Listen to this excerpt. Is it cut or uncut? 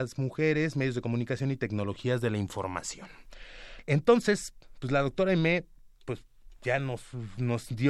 cut